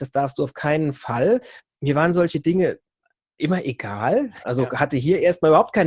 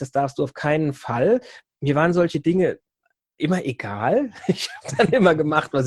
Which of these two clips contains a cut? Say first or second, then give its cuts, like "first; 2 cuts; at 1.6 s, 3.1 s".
first; 1 cut; at 4.4 s